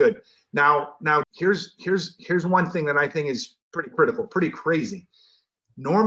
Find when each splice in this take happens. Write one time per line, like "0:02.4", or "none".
0:01.2
0:03.6